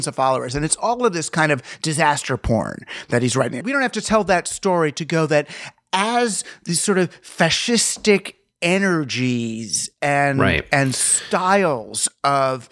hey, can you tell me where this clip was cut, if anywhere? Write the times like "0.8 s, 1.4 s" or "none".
3.6 s